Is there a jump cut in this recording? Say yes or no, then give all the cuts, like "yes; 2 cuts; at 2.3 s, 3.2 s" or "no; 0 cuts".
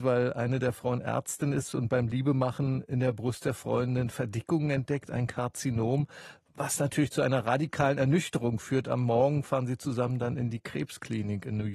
no; 0 cuts